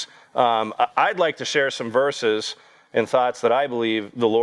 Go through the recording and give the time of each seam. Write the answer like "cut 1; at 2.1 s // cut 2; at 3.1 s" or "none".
none